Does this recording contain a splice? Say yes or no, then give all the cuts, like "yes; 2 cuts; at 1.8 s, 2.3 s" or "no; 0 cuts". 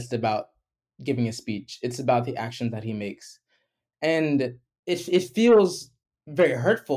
no; 0 cuts